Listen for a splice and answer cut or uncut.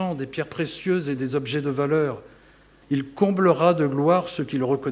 cut